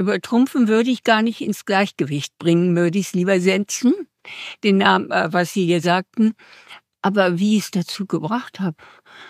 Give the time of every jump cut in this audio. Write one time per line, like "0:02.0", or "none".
0:05.8